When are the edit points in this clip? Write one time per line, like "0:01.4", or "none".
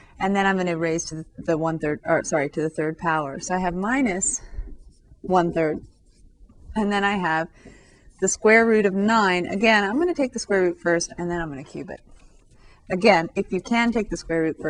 none